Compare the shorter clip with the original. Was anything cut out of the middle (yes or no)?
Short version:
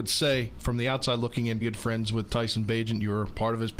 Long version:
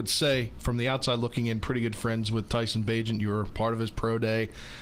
yes